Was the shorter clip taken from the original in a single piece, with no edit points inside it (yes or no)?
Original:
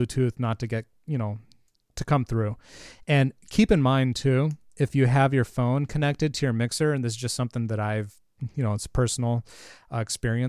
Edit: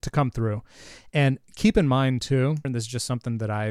no